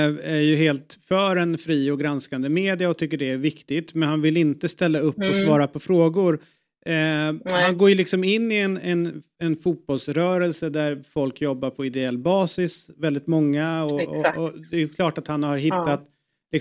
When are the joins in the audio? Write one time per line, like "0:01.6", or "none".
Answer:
none